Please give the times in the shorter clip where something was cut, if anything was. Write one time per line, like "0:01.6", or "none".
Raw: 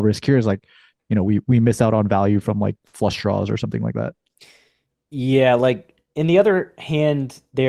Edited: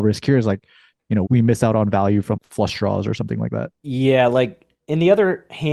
0:01.3
0:02.4
0:03.7